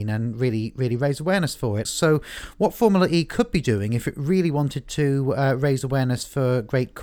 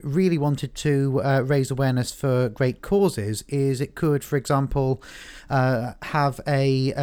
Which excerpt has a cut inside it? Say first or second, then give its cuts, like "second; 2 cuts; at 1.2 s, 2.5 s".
first; 1 cut; at 1.9 s